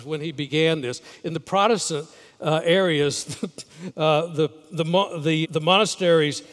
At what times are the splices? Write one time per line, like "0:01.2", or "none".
0:05.4